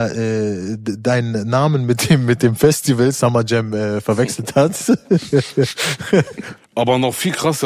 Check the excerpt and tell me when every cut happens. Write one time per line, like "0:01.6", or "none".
0:06.6